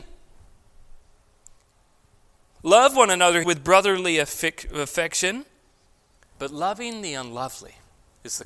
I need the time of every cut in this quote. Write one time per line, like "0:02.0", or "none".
0:03.4
0:06.3